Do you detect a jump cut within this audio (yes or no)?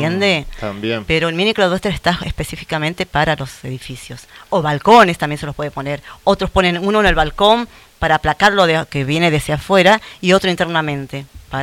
no